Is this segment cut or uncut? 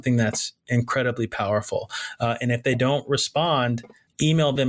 uncut